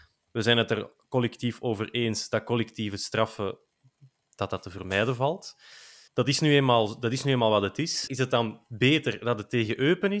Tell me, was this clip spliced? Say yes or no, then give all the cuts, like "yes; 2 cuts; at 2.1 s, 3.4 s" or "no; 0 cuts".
yes; 2 cuts; at 6.1 s, 8.1 s